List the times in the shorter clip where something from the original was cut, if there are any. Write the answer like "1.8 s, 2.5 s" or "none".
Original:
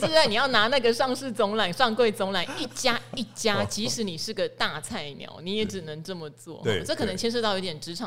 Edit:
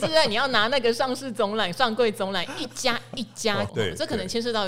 3.7 s